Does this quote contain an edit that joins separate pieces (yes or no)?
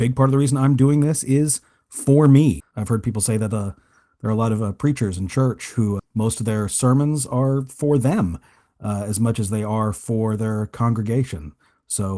yes